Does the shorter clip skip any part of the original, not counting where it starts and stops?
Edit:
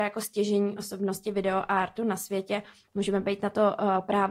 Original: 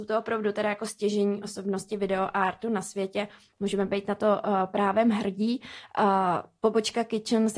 no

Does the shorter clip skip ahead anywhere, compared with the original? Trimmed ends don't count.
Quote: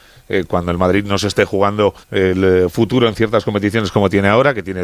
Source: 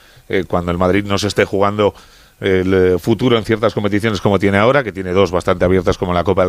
yes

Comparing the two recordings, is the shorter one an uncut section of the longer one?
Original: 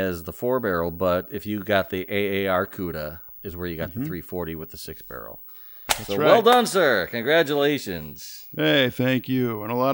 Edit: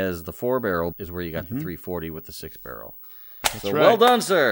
no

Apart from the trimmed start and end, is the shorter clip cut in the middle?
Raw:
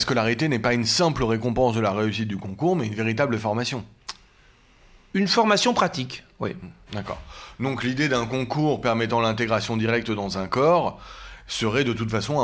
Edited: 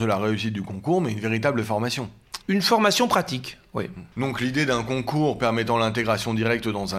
yes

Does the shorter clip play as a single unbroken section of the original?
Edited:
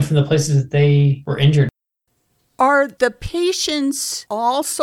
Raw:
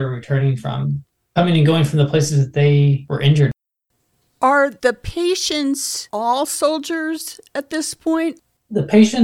yes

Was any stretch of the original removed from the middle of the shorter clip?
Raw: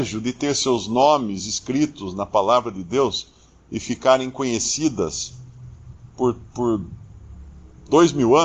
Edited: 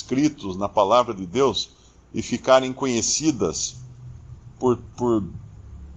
no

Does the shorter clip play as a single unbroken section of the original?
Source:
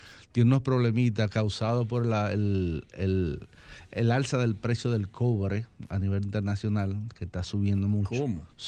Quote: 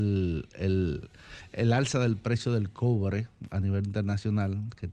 yes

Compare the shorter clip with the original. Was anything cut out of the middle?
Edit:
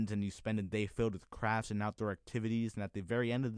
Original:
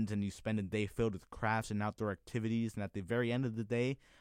no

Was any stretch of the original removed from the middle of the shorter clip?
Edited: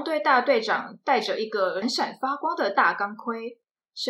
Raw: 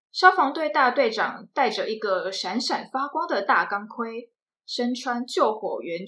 yes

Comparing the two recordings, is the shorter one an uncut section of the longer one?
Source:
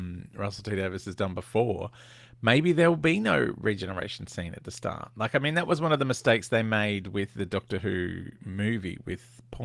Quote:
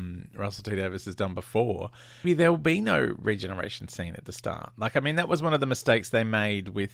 no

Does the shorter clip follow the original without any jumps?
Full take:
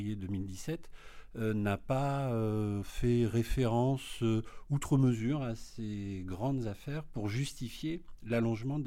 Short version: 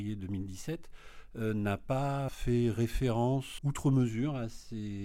no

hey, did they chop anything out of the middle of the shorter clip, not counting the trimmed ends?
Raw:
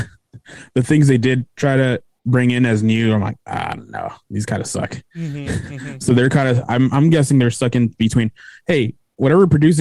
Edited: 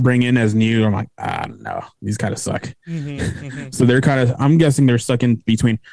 yes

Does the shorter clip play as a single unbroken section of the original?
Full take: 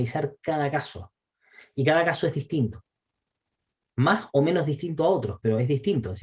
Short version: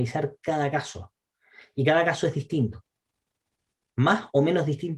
yes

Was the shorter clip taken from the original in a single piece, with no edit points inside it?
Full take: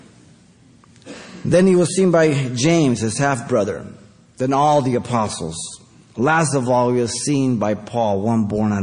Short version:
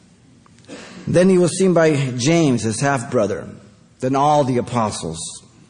yes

